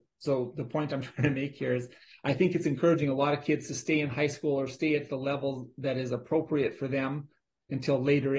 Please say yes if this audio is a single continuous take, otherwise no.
yes